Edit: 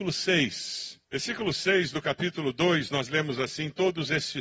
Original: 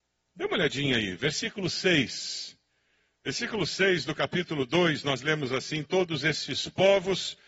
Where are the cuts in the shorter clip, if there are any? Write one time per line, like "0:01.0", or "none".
0:01.0